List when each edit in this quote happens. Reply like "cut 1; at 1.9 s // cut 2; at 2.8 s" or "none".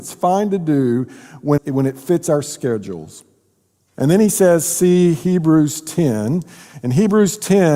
cut 1; at 1.6 s // cut 2; at 3.9 s